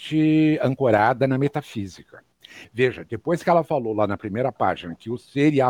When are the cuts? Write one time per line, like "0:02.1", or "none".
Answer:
0:02.6